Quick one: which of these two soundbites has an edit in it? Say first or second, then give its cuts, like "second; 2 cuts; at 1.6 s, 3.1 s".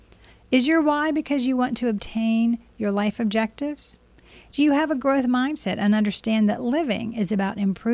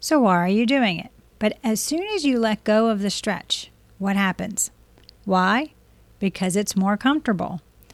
second; 2 cuts; at 1.4 s, 5.2 s